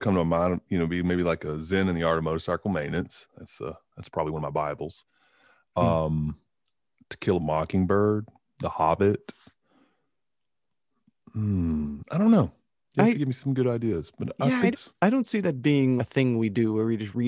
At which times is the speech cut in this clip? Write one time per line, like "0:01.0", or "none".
0:14.7
0:16.0